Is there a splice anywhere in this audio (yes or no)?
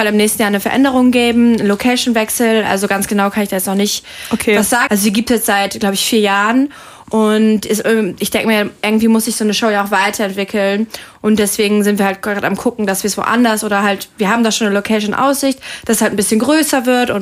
yes